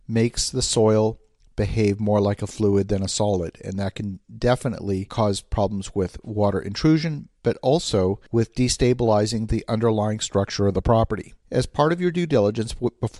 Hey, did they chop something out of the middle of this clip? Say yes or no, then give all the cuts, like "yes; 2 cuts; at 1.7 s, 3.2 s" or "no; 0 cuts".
yes; 2 cuts; at 8.3 s, 11.4 s